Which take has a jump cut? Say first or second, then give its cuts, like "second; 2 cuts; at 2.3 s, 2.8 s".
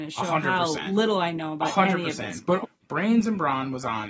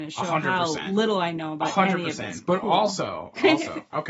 first; 1 cut; at 2.6 s